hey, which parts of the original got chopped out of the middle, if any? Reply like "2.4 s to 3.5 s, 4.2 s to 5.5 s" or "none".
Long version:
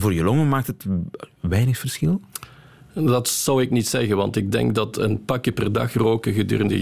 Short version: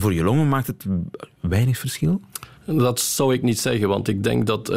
2.5 s to 2.8 s